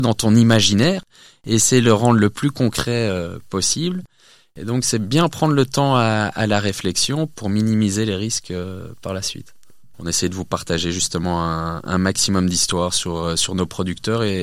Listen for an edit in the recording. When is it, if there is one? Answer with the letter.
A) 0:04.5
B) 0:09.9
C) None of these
B